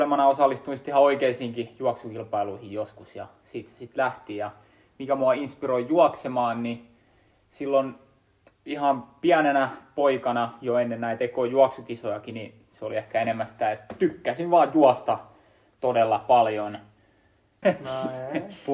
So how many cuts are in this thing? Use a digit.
1